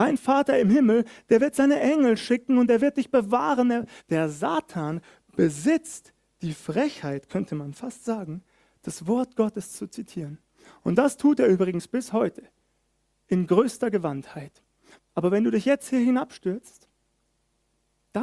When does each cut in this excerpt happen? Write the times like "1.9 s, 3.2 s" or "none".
4.0 s, 15.0 s